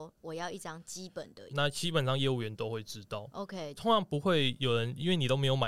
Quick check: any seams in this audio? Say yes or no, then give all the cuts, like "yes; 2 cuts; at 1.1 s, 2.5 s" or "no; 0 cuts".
yes; 2 cuts; at 1.5 s, 3.8 s